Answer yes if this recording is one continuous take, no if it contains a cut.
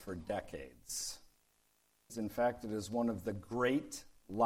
no